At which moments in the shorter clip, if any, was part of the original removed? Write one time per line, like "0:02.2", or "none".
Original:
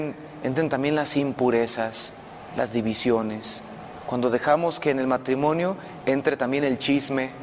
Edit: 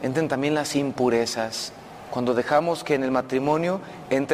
0:02.1